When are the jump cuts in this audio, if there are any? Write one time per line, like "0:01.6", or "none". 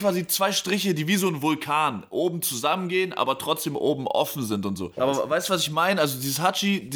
0:05.0